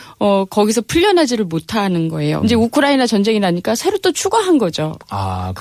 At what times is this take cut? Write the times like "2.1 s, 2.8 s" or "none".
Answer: 2.4 s